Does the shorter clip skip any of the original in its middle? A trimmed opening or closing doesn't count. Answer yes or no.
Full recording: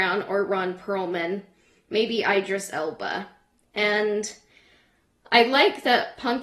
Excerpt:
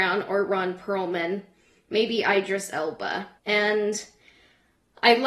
yes